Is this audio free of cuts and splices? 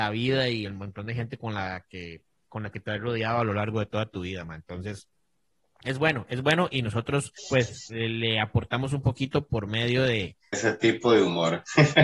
no; 2 cuts; at 7.4 s, 10.5 s

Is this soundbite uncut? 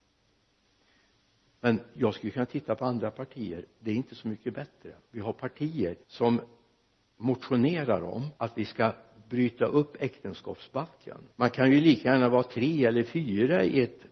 no; 3 cuts; at 6.0 s, 8.3 s, 11.3 s

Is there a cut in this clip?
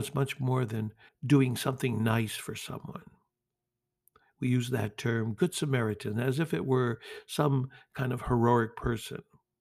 yes; 1 cut; at 1.1 s

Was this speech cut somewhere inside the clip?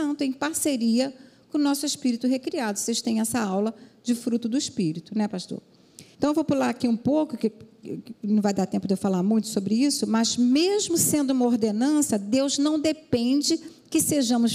yes; 1 cut; at 6.1 s

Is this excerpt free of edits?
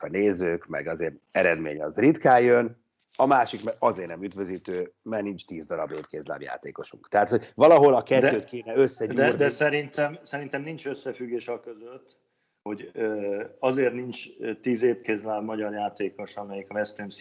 yes; 0 cuts

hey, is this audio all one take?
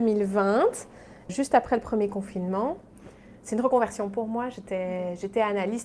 no; 1 cut; at 1.3 s

